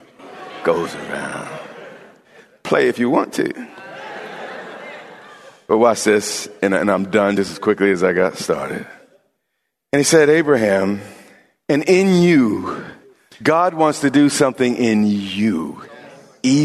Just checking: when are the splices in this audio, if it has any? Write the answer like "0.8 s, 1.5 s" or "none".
none